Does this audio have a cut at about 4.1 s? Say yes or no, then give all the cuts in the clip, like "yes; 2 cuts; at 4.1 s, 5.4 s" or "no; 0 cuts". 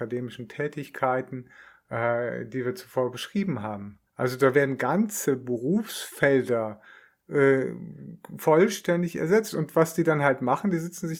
yes; 1 cut; at 4.1 s